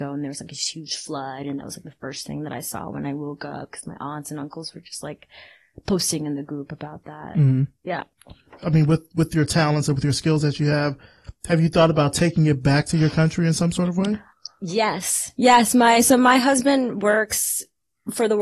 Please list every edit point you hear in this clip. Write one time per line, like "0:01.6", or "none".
0:08.6